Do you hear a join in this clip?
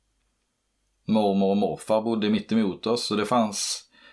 no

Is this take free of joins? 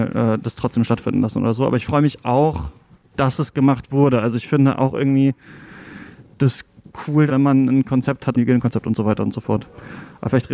no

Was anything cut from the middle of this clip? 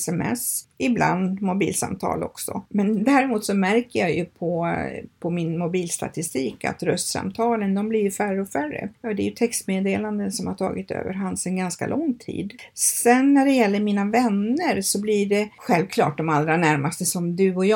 no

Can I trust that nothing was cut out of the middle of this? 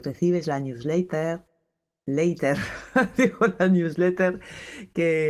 yes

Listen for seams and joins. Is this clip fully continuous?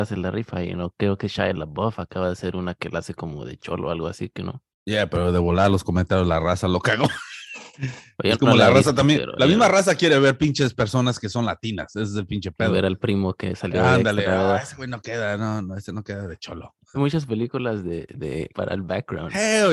no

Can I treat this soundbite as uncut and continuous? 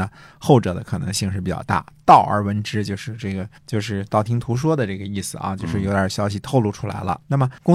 no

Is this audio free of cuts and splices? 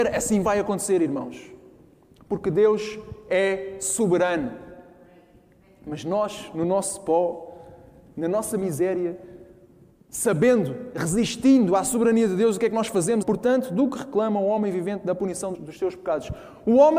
no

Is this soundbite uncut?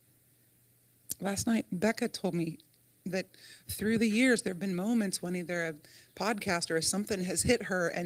yes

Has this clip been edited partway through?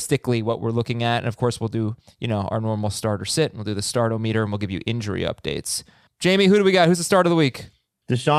yes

